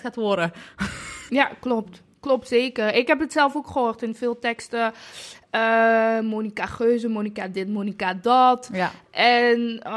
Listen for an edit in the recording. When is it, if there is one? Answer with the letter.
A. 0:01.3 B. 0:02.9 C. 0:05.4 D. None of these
A